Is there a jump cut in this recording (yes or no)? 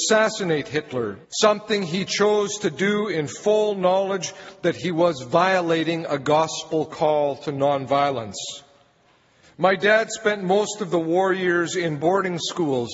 yes